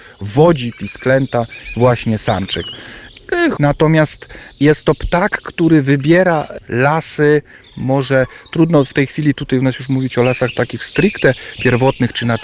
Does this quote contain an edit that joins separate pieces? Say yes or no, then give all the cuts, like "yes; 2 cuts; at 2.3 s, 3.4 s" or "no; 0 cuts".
yes; 1 cut; at 3.6 s